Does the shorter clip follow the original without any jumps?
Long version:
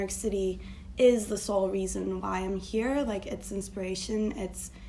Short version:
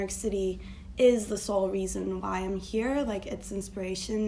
yes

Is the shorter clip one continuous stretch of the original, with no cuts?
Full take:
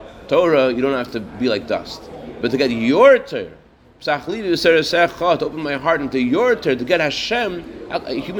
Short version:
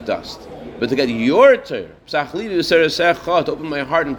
no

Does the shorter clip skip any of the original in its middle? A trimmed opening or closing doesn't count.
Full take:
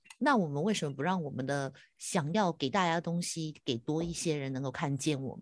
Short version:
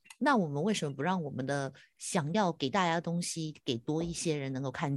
no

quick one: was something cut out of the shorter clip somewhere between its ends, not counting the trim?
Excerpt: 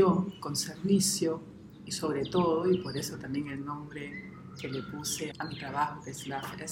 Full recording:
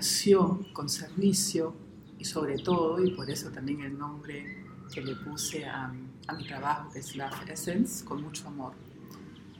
yes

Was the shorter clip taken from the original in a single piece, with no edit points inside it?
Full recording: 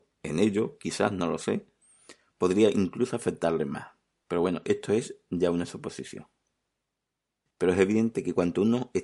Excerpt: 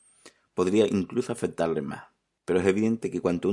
no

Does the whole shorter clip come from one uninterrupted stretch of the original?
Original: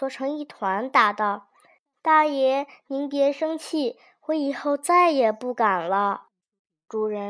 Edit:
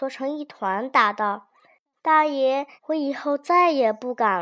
no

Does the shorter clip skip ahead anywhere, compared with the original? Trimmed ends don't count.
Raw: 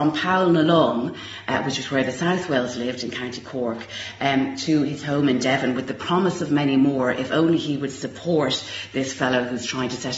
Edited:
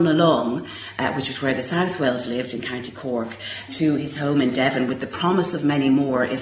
yes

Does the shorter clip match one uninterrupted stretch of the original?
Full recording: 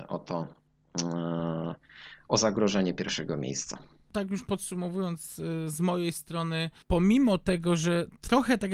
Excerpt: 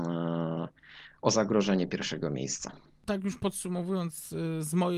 yes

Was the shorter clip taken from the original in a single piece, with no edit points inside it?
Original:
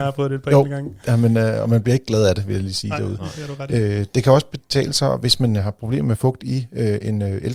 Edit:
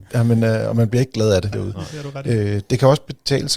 no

